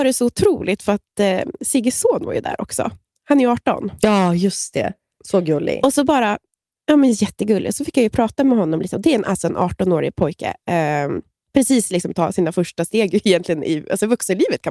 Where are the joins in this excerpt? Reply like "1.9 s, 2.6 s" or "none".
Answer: none